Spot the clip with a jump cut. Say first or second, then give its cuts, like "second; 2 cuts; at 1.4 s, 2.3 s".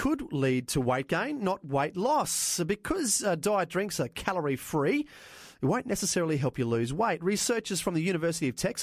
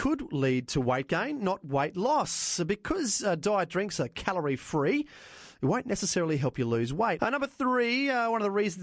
second; 1 cut; at 7.2 s